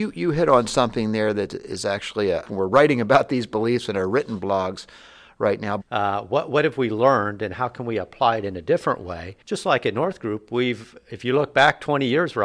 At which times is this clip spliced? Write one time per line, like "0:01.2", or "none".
0:02.4
0:05.8
0:09.4